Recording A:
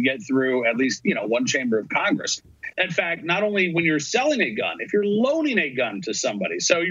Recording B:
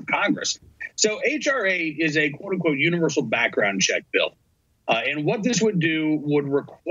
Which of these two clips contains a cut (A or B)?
A